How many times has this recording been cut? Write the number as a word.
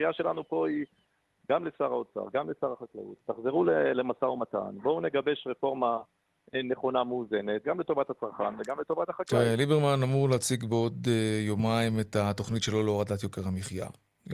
one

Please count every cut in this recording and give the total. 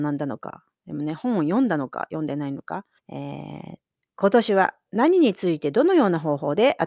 one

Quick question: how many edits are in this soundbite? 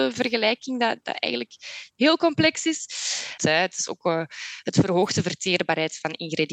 one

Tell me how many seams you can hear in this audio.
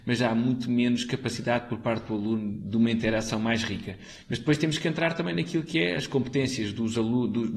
one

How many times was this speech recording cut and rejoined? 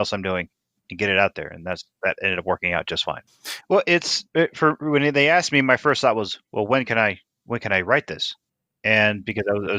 one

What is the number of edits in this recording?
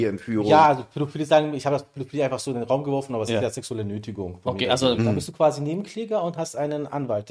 one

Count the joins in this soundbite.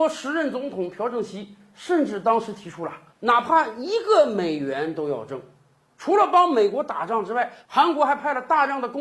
one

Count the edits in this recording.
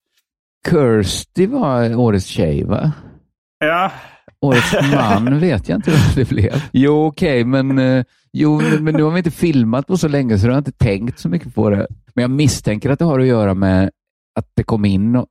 two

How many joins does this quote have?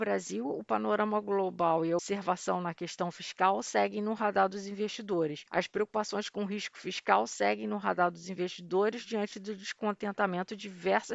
one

